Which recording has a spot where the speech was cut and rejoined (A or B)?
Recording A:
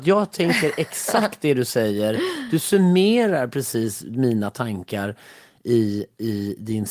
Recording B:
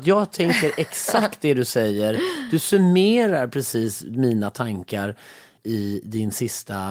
B